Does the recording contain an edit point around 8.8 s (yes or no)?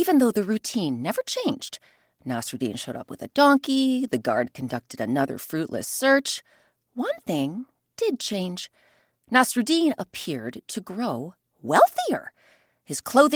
no